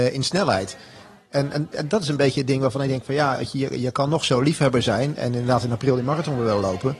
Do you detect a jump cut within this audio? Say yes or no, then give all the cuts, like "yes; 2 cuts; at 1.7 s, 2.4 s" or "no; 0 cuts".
no; 0 cuts